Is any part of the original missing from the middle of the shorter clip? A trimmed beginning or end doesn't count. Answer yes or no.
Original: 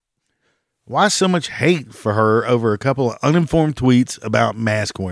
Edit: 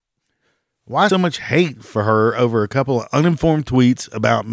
yes